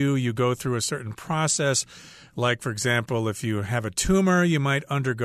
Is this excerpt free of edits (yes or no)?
yes